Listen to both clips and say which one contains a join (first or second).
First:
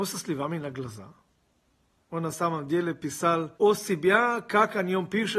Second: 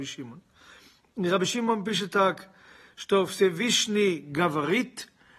first